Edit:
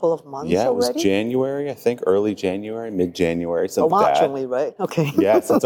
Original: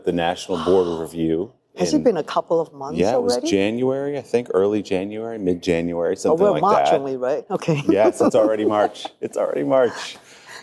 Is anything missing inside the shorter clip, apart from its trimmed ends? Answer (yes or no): yes